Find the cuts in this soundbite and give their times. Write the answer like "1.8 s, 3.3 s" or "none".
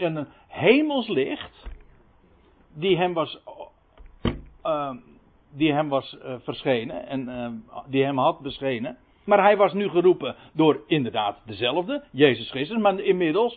9.2 s